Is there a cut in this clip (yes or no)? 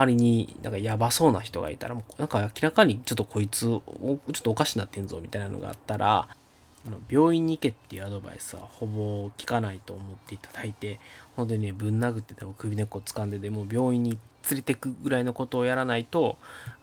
no